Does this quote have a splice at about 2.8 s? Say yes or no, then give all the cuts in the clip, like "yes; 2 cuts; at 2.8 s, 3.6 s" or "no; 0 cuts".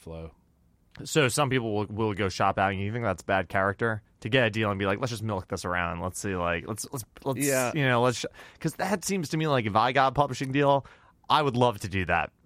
no; 0 cuts